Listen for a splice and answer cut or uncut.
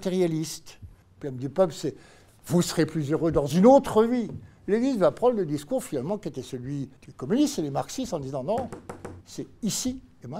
cut